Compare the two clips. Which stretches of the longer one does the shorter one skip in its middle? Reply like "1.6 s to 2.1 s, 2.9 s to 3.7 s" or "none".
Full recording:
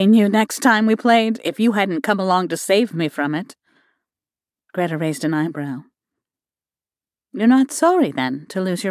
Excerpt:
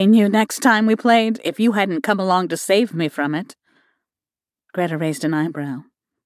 none